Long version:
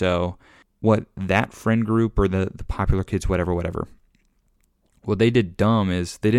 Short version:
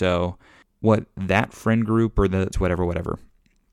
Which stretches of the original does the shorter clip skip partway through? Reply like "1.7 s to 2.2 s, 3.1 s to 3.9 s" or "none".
2.5 s to 3.2 s